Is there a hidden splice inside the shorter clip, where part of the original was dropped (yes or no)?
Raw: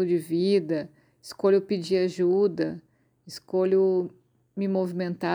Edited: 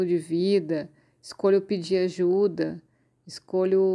no